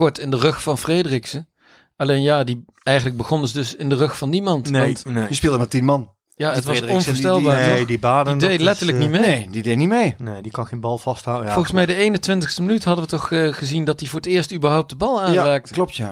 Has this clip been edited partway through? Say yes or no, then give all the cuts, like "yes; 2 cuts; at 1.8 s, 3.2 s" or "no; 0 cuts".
no; 0 cuts